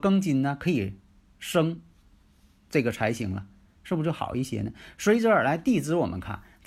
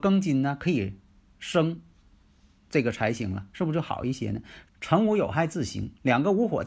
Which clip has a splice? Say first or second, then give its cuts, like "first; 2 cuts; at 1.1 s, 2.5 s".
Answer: second; 2 cuts; at 3.5 s, 4.6 s